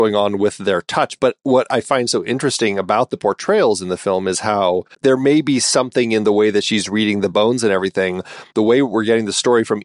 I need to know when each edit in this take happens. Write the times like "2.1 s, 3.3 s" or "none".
4.9 s, 8.5 s